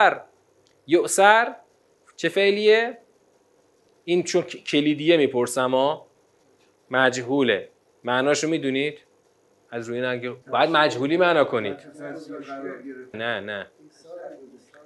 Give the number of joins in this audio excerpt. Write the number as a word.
two